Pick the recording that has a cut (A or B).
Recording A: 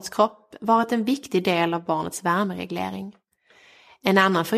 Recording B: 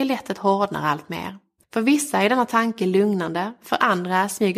B